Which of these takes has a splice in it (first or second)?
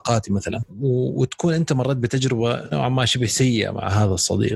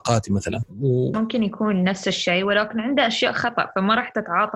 second